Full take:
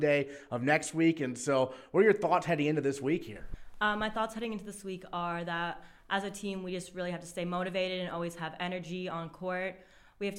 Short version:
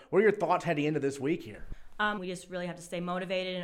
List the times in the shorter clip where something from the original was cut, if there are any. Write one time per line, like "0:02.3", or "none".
0:02.2